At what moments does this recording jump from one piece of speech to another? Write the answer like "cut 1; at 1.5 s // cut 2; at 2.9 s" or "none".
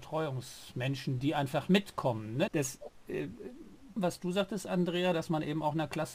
cut 1; at 2.5 s // cut 2; at 4.0 s